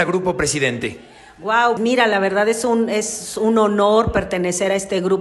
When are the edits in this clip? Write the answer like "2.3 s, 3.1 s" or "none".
1.8 s